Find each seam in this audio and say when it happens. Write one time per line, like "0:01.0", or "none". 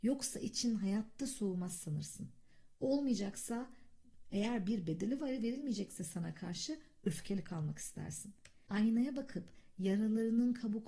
0:08.7